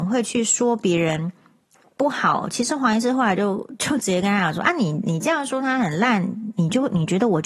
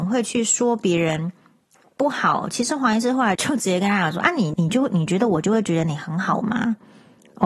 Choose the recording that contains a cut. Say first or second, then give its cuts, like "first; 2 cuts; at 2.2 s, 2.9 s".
second; 2 cuts; at 3.4 s, 4.5 s